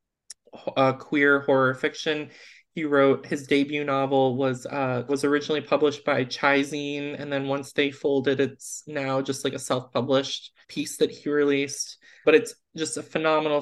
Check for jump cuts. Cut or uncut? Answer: cut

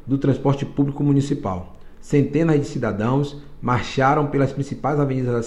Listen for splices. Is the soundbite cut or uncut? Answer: uncut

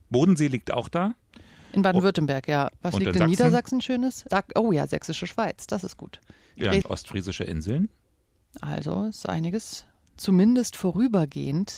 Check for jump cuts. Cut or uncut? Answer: cut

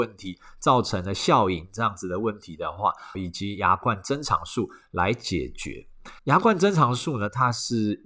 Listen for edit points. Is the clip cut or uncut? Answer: cut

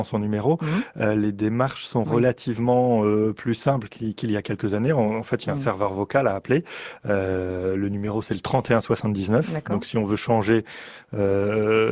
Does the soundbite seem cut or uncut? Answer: uncut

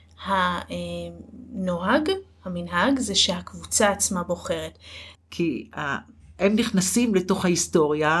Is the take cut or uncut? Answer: cut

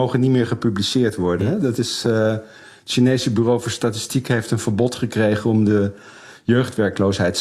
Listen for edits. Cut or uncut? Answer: uncut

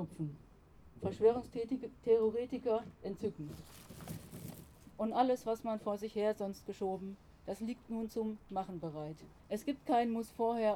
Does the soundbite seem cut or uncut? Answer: cut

